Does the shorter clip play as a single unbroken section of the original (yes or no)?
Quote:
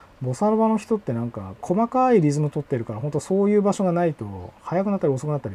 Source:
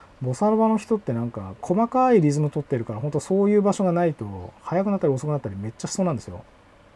yes